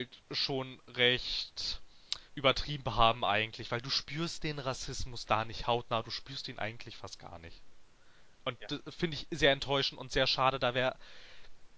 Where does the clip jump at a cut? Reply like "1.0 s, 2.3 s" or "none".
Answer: 2.3 s